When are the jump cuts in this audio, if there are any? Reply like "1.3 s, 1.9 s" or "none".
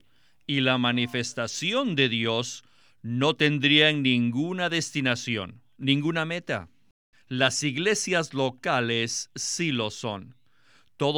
7.1 s